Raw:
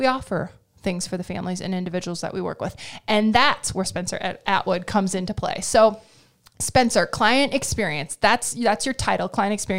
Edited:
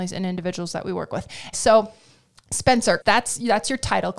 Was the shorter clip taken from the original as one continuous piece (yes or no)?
no